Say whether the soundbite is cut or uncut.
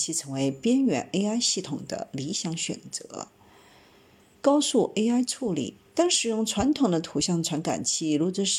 cut